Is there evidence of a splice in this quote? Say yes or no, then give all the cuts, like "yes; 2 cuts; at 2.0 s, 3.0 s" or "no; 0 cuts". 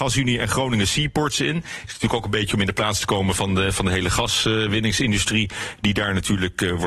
no; 0 cuts